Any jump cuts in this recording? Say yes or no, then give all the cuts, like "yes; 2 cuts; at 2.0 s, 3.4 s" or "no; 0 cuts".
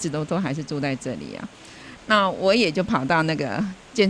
yes; 1 cut; at 2.0 s